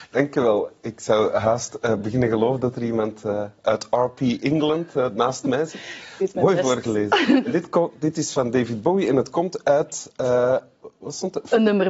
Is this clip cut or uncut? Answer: uncut